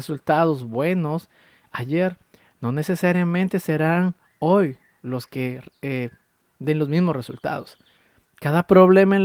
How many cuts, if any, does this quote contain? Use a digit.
0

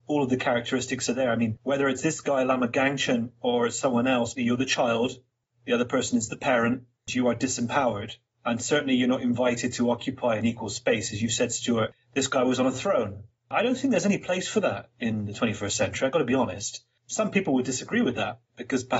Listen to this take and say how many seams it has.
1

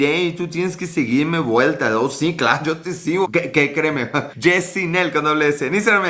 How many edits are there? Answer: 2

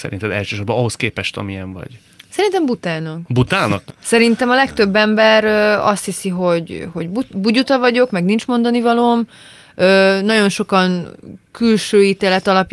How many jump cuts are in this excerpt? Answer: 1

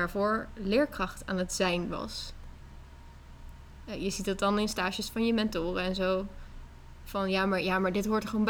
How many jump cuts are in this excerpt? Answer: 1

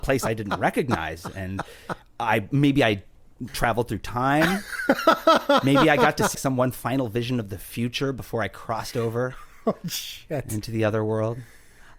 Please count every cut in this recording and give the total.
2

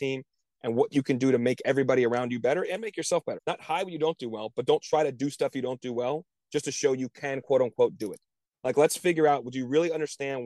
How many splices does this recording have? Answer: 1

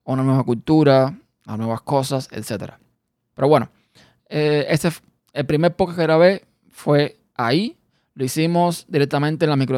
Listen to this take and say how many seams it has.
1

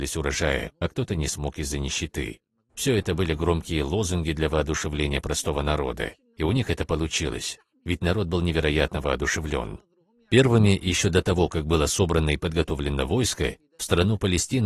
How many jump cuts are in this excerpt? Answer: 1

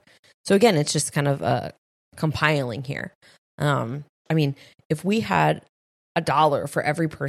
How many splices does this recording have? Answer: 1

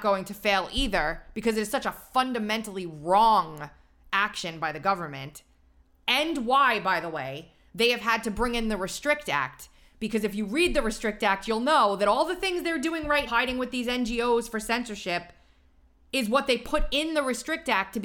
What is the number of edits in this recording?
1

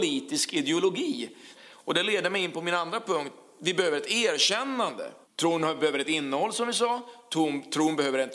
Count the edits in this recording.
2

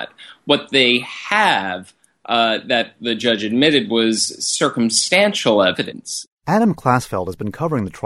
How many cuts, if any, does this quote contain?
0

